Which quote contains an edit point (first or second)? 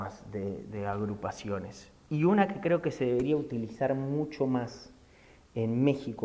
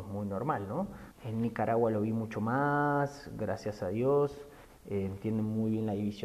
second